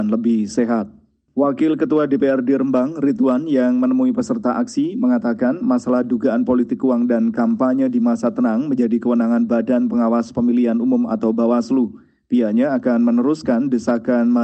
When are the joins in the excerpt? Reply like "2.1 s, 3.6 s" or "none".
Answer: none